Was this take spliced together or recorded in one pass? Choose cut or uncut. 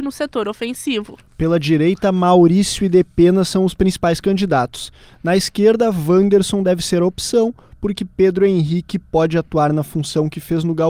uncut